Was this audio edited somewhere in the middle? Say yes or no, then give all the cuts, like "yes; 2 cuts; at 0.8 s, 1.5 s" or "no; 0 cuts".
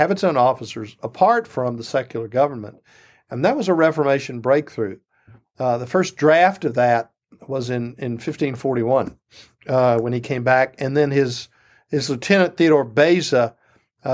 no; 0 cuts